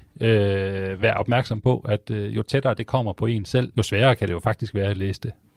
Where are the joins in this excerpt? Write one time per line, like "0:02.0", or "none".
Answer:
0:03.7